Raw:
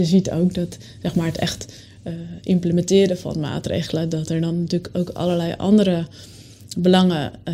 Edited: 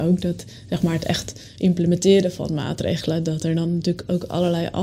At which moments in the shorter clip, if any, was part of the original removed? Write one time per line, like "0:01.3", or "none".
0:01.6